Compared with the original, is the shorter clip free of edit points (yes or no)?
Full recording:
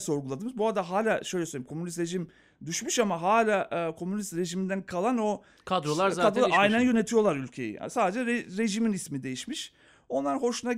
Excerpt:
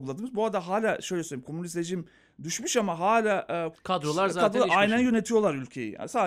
no